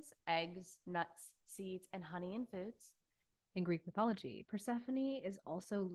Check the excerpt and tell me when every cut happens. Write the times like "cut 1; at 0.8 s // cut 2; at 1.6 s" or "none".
cut 1; at 3.4 s